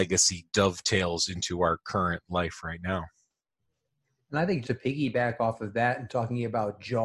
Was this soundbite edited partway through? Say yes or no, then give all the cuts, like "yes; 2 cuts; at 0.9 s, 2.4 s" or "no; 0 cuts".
yes; 1 cut; at 4.6 s